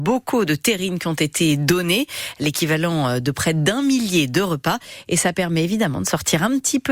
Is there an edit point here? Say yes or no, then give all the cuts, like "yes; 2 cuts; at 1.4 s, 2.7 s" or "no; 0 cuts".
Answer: no; 0 cuts